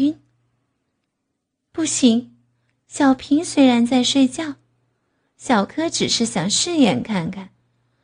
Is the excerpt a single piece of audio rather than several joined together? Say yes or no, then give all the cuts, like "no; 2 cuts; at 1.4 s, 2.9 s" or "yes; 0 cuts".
yes; 0 cuts